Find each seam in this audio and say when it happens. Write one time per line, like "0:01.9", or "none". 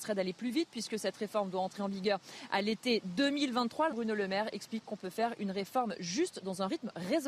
0:03.9